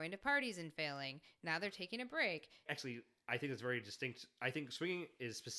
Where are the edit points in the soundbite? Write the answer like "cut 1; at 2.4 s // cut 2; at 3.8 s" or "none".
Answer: cut 1; at 2.7 s